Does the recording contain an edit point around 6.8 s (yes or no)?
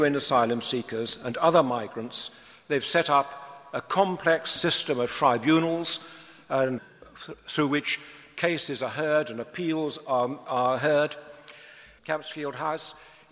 yes